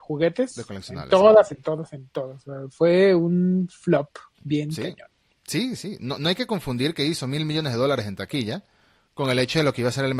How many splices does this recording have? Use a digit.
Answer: 1